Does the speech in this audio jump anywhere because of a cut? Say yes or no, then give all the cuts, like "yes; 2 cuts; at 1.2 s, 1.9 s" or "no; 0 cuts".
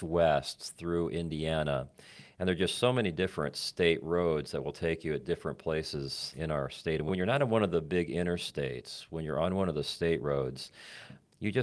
no; 0 cuts